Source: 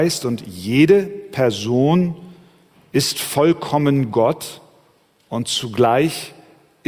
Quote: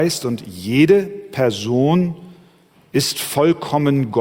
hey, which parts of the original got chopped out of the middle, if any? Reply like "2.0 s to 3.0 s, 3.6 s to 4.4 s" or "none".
none